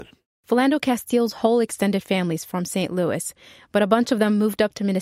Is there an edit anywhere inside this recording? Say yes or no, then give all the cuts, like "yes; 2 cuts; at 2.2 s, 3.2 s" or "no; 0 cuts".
no; 0 cuts